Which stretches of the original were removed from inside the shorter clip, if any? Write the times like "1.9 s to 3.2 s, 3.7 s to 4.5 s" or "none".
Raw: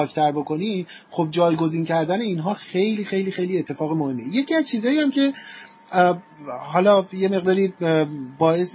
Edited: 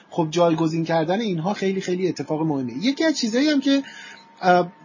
2.6 s to 3.1 s

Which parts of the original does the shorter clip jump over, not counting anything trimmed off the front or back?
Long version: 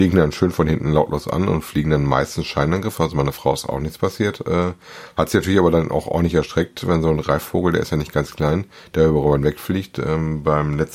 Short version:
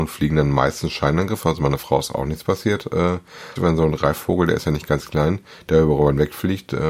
5.1 s to 6.8 s

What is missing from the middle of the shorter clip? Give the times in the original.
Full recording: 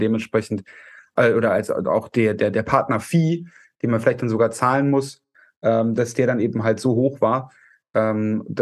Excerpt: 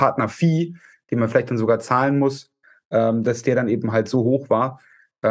none

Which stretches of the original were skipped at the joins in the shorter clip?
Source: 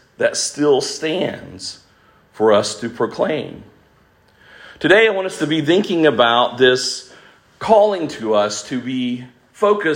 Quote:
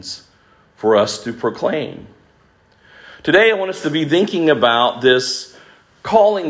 none

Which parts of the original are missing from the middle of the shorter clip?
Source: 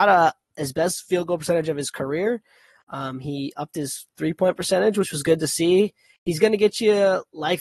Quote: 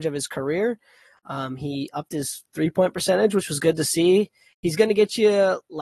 none

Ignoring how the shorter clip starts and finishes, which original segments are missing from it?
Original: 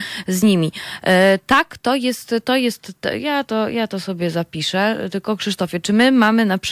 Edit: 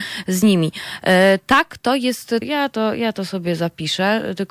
2.4 s to 3.2 s

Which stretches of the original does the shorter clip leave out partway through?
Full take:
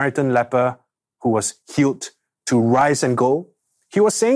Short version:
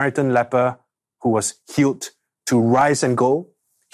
none

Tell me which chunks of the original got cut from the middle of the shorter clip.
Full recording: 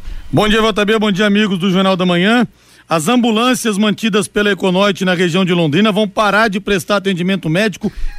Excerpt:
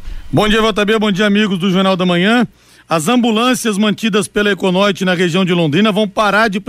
none

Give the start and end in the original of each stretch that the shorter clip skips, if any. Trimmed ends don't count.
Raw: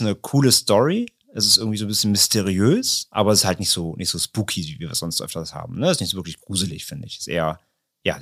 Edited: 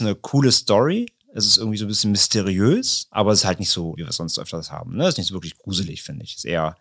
3.9 s to 4.8 s

